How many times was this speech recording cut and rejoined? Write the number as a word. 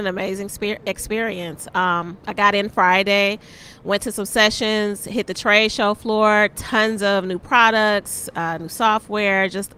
zero